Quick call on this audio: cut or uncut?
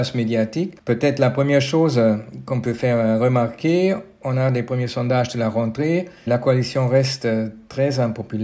cut